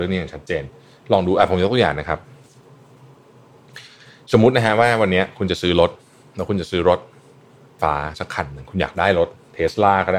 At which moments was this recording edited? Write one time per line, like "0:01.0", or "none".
0:07.8